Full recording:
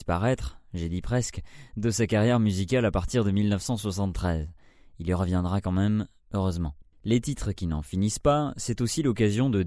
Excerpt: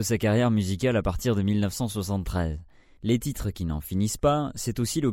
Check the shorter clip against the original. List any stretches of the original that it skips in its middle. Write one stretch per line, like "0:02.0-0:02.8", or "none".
0:04.9-0:07.0

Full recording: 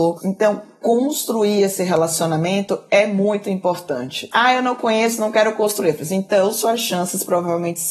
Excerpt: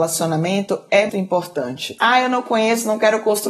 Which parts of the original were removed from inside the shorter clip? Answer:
0:03.1-0:03.4

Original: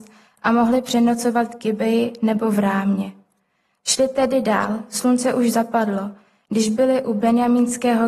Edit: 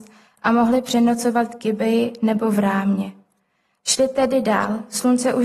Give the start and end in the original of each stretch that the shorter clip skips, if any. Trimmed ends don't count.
none

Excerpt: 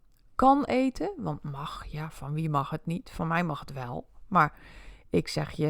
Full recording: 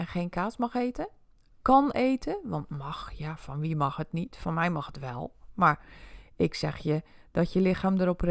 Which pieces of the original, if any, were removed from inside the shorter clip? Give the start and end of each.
none

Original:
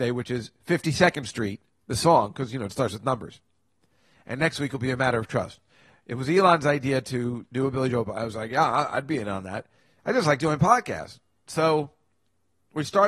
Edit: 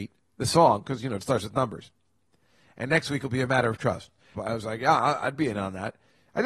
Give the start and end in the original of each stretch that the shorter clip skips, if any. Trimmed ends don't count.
0:05.8-0:08.1

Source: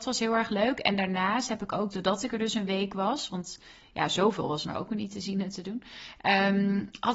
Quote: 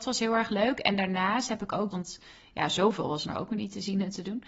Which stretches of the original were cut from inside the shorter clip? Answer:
0:01.9-0:03.3

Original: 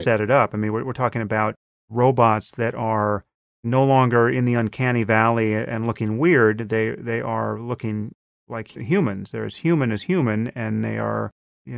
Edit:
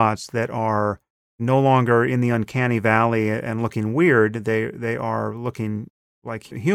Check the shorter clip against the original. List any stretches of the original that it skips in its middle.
none

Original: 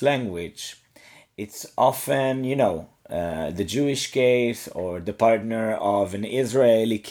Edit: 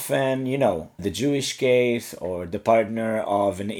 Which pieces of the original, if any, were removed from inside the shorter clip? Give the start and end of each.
0:03.0-0:03.5

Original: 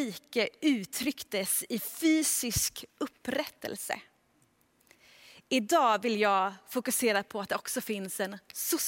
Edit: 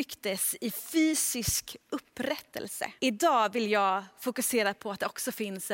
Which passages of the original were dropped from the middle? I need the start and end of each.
0:04.0-0:05.5

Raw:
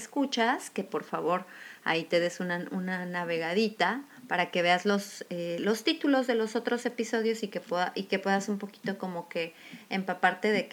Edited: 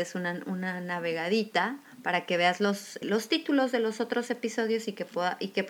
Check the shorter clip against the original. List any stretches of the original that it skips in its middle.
0:05.3-0:05.6

